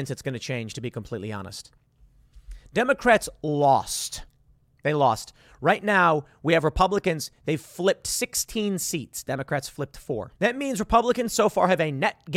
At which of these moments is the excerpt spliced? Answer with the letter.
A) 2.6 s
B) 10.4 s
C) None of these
B